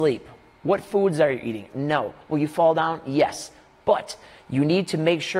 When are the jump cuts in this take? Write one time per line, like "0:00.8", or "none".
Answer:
0:01.7